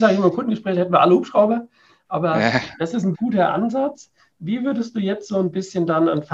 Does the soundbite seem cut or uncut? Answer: cut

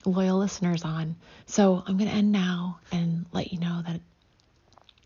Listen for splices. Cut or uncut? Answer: cut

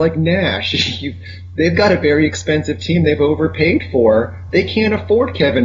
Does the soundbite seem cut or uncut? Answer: uncut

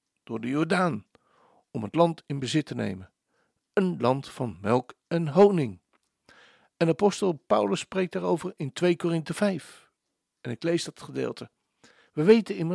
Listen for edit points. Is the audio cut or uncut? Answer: uncut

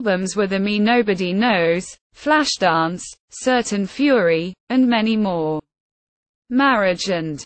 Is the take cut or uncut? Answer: uncut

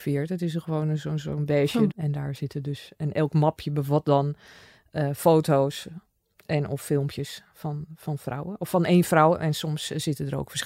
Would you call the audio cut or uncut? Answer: cut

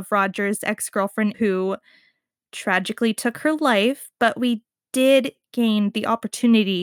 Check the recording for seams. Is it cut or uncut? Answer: cut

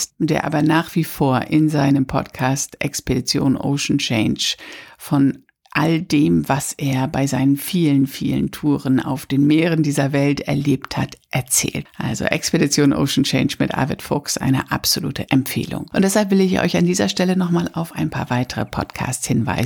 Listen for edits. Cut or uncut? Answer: cut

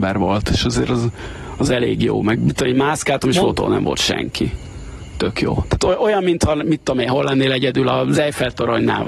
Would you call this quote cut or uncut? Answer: uncut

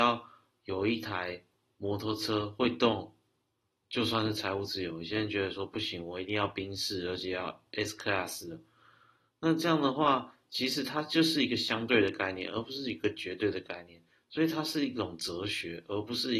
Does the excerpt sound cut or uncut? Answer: uncut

